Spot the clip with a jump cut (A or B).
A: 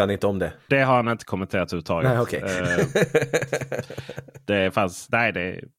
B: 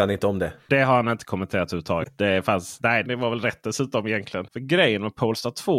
B